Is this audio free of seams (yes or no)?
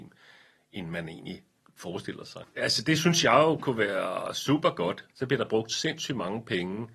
no